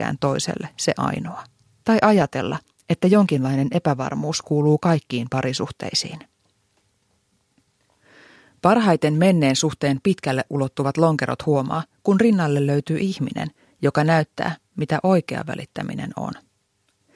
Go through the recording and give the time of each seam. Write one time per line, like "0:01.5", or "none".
0:01.8